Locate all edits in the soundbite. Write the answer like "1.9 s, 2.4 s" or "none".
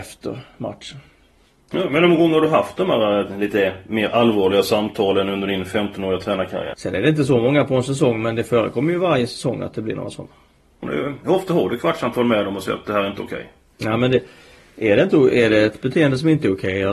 6.7 s, 10.8 s